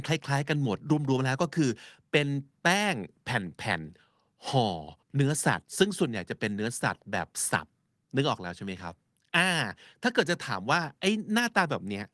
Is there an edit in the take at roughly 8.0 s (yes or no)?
no